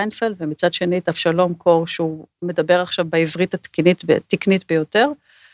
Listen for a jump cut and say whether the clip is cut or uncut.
uncut